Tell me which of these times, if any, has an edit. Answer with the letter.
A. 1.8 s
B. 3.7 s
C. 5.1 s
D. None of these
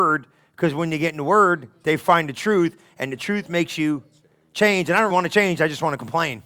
C